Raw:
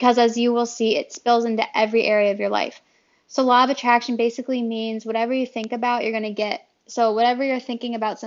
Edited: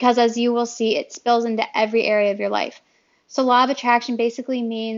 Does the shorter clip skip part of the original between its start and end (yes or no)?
no